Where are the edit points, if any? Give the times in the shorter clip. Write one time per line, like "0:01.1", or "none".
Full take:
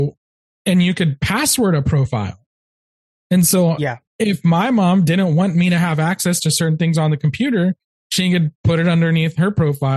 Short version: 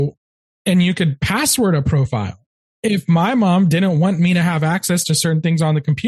0:02.7